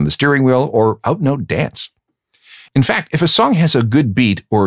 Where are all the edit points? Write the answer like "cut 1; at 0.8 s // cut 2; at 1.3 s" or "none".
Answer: none